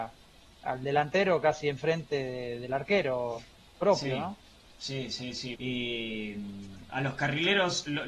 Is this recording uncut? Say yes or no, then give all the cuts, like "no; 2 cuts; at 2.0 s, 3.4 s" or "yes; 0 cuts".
no; 1 cut; at 5.5 s